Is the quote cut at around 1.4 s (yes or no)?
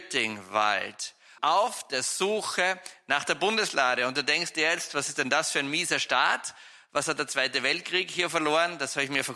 yes